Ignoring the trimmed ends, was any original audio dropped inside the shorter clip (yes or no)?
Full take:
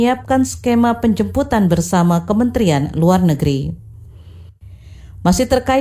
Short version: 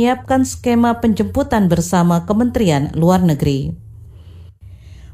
no